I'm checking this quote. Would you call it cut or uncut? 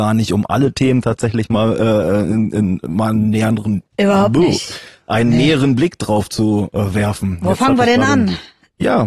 uncut